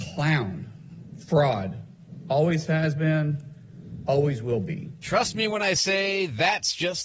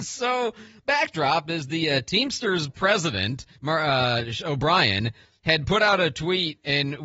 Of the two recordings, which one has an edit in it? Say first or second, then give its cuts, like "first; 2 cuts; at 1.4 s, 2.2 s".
second; 1 cut; at 3.5 s